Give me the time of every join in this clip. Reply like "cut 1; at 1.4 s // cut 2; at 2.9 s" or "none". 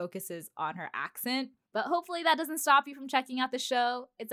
cut 1; at 1.7 s